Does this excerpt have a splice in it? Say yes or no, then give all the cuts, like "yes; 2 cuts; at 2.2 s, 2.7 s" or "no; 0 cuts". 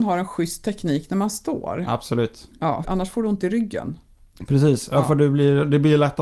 yes; 1 cut; at 2.8 s